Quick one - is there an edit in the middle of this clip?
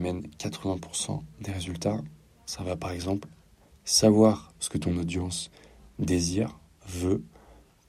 no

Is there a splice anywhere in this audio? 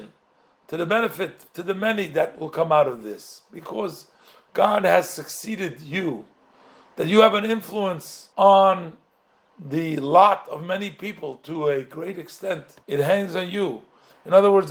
yes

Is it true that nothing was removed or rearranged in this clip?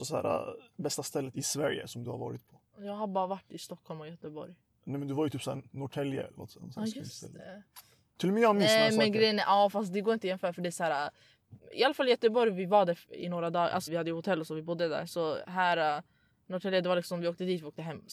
no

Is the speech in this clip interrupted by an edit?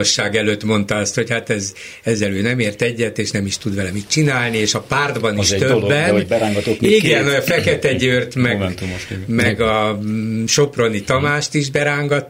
no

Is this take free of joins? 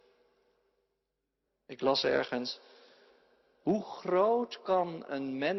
no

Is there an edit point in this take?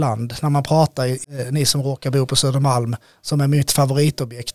yes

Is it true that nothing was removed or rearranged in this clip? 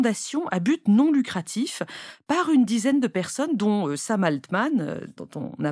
yes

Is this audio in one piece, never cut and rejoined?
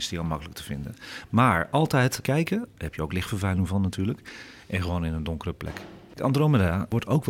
no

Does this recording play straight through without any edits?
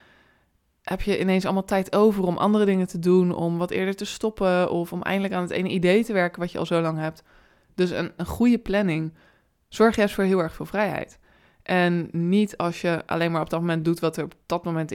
no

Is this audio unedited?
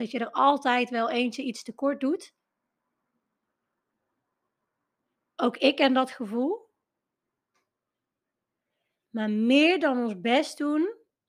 yes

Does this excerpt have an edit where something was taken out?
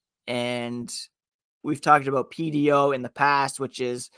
no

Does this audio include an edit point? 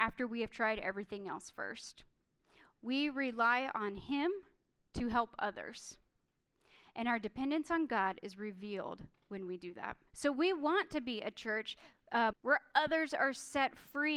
yes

